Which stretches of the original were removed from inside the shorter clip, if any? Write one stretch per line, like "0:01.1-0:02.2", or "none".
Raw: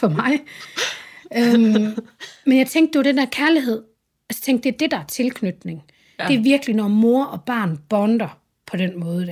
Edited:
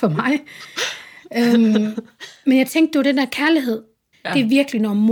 0:04.1-0:06.1